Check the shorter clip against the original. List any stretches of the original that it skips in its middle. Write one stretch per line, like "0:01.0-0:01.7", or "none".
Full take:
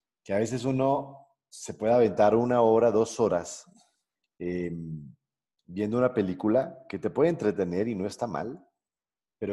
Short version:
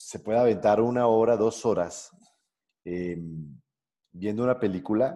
none